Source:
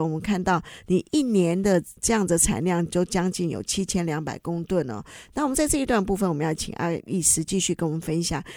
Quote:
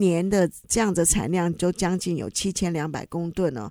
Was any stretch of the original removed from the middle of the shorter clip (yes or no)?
no